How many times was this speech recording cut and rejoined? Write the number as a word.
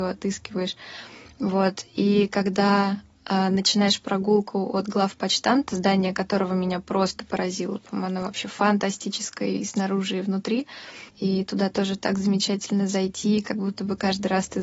one